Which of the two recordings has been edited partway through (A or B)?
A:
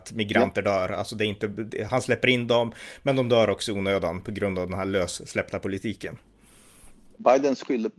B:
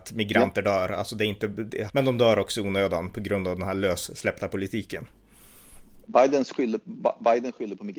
B